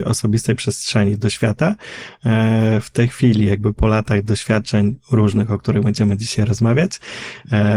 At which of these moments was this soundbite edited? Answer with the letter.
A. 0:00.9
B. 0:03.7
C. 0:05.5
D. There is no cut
B